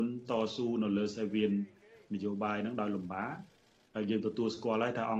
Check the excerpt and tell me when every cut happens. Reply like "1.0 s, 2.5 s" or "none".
none

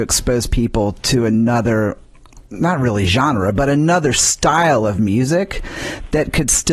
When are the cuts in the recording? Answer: 2.5 s

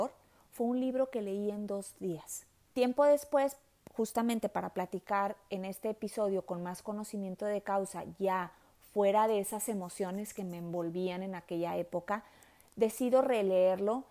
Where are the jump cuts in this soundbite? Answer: 2.7 s

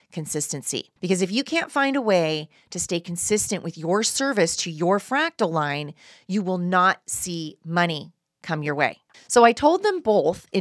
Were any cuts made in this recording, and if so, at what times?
1.0 s, 9.1 s

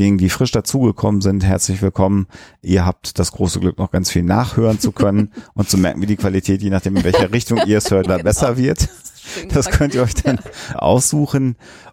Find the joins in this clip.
8.1 s, 10.7 s

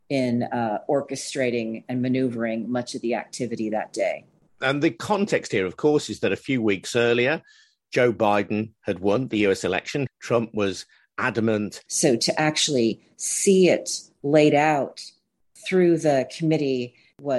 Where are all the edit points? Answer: 10.1 s, 11.9 s

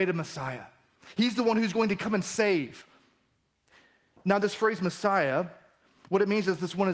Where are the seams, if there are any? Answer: none

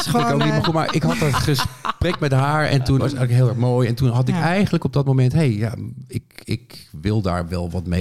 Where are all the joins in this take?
3.0 s

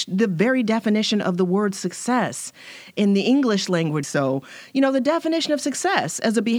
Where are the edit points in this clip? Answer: 4.0 s

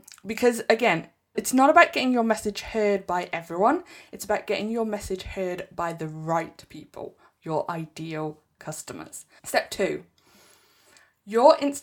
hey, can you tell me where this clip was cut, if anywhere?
1.3 s, 9.4 s

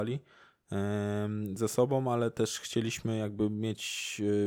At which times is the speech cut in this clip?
none

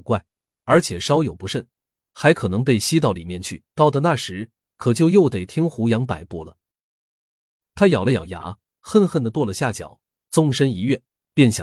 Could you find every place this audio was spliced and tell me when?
3.7 s

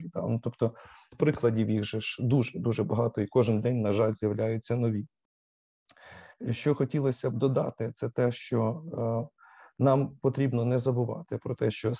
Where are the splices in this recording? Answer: none

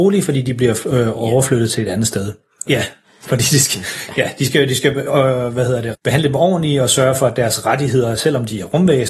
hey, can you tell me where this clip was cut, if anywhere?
2.7 s, 5.9 s

